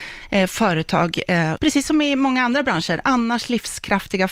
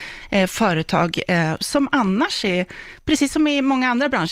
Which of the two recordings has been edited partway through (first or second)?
first